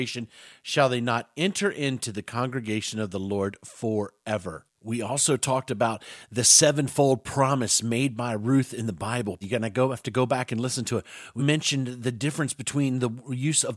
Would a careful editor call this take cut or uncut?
cut